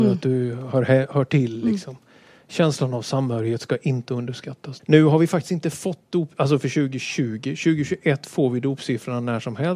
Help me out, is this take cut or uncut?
cut